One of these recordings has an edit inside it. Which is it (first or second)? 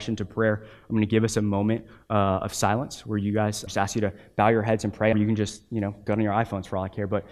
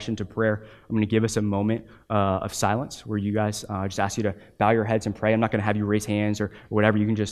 first